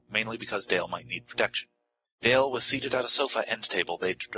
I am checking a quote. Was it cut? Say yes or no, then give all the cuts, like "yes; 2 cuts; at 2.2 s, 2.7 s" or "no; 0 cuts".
yes; 1 cut; at 2.0 s